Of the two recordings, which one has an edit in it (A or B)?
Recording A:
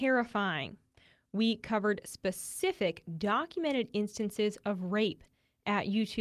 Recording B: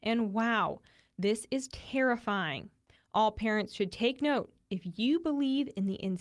B